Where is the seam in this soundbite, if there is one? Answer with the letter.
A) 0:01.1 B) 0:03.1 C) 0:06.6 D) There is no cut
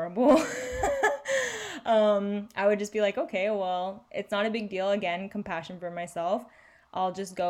D